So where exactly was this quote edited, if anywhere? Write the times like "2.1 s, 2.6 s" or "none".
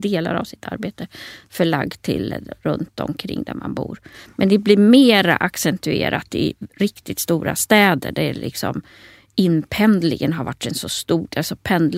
none